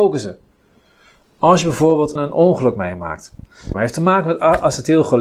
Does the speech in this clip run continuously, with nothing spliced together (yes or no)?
no